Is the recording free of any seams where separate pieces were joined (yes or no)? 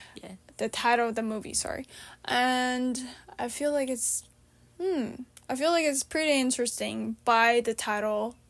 yes